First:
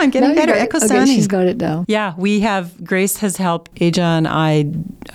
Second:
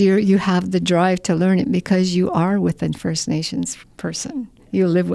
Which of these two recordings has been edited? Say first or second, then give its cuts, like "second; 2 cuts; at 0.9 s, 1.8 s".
first; 2 cuts; at 1.8 s, 3.7 s